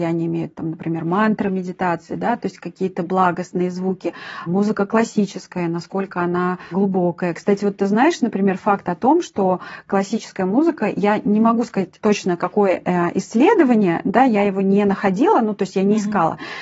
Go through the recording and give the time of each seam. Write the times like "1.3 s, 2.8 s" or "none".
none